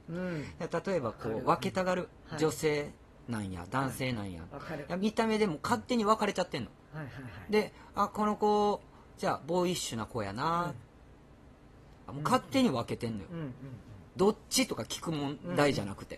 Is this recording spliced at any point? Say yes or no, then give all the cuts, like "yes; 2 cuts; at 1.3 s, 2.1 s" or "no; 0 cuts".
yes; 1 cut; at 12.1 s